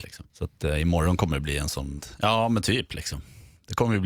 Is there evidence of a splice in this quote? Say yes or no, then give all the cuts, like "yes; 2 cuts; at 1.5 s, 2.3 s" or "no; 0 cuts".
yes; 1 cut; at 2.0 s